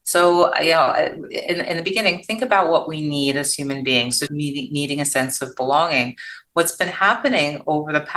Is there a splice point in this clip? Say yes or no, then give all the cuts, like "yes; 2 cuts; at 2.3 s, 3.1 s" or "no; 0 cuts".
yes; 1 cut; at 4.3 s